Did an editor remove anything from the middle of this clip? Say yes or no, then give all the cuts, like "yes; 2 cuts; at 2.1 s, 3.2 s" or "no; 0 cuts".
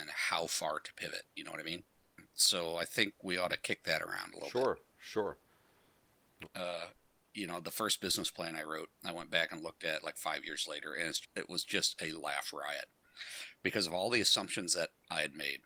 yes; 2 cuts; at 6.4 s, 11.2 s